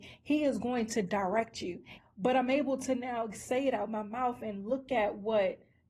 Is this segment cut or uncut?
cut